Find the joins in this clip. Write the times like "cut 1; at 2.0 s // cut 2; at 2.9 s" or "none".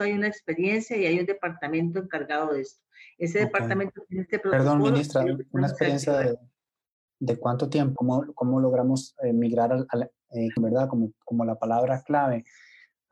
cut 1; at 8.0 s // cut 2; at 10.6 s